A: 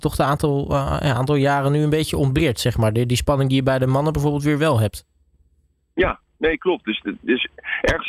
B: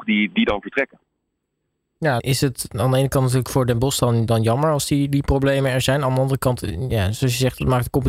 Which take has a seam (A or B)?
B